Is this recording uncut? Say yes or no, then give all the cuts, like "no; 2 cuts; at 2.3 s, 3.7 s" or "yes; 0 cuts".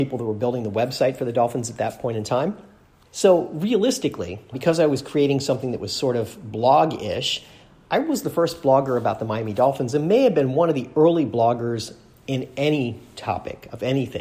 no; 2 cuts; at 3.0 s, 4.5 s